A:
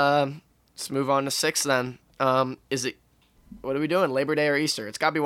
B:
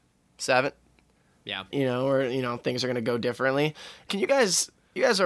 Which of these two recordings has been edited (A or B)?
B